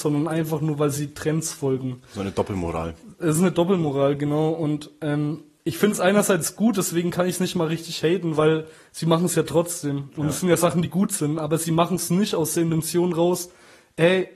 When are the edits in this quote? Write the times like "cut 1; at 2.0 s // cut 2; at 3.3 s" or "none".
none